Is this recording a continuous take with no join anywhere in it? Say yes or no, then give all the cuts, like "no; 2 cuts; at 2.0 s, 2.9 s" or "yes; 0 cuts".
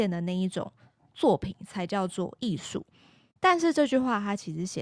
yes; 0 cuts